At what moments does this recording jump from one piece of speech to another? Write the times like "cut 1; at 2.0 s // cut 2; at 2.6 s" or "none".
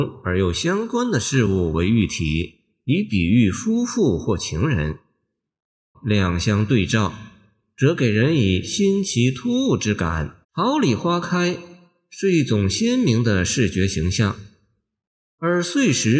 cut 1; at 5.9 s // cut 2; at 10.4 s